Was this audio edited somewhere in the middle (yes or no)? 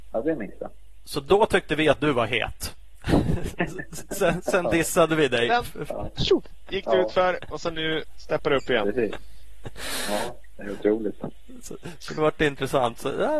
yes